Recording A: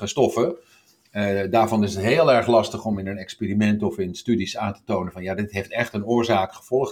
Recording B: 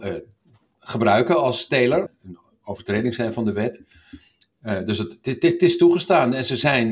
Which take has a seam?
B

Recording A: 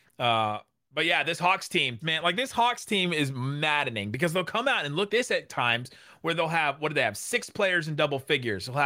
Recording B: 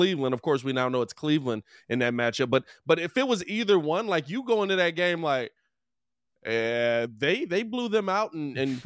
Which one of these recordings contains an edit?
A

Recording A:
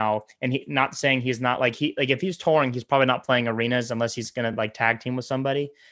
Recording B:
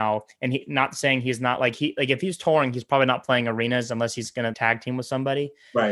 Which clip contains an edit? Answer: B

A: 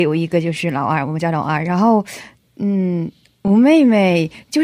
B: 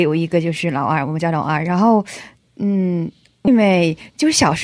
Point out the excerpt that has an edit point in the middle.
B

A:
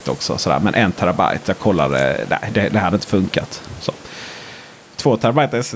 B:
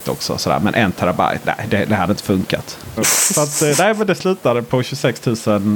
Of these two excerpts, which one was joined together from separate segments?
B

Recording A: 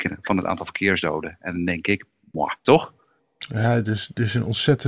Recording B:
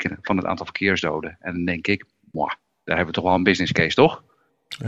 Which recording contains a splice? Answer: A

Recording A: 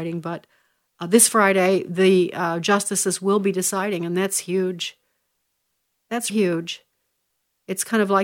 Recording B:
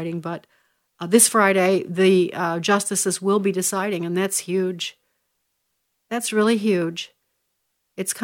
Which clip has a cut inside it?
A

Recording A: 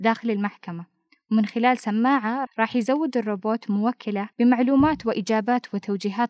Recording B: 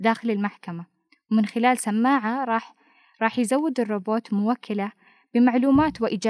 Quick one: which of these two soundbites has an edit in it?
A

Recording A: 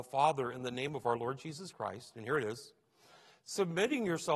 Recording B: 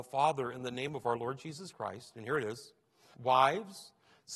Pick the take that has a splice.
B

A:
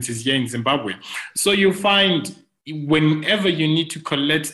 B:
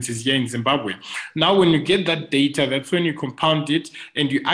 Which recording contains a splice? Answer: A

